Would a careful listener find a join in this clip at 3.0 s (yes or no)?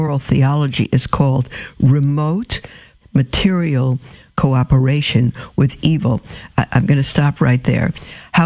yes